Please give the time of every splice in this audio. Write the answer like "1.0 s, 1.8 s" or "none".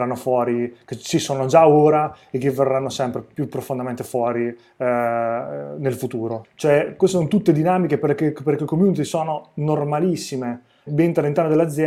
6.4 s, 10.9 s